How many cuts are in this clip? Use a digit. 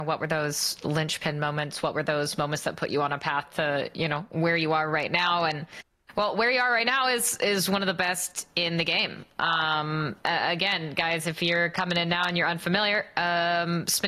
0